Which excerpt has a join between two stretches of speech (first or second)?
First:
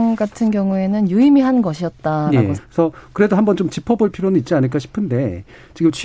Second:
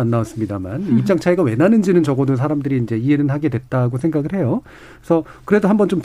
first